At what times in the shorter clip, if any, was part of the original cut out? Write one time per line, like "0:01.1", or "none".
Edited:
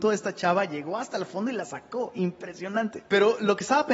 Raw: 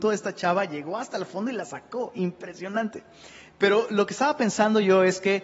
0:03.1